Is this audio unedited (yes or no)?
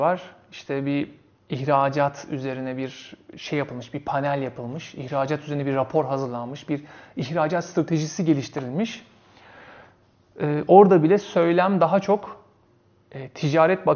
yes